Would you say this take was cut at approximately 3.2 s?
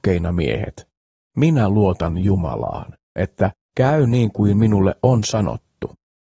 yes; 1 cut; at 3.2 s

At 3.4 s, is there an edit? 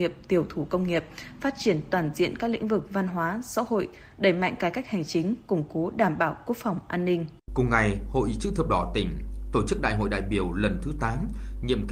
no; 1 cut; at 7.4 s

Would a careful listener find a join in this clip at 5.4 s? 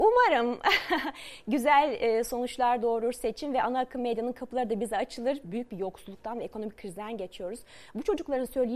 yes; 1 cut; at 5.4 s

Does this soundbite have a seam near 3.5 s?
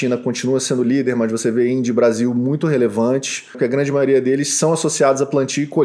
yes; 1 cut; at 3.5 s

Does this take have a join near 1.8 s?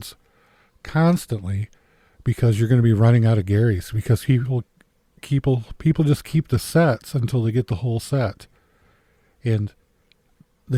no; 0 cuts

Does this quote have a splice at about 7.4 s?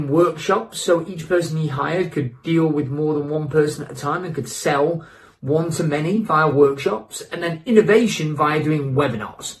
no; 0 cuts

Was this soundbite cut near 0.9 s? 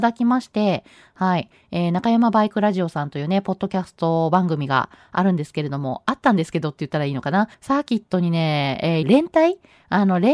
no; 2 cuts; at 7.5 s, 9.0 s

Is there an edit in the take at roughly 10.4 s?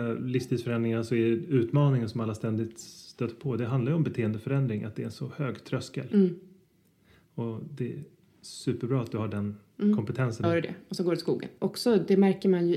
yes; 2 cuts; at 10.4 s, 11.6 s

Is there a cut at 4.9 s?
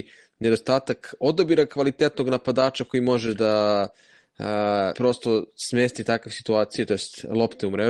yes; 1 cut; at 4.9 s

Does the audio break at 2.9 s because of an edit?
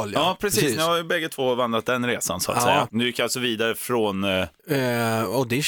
yes; 1 cut; at 2.9 s

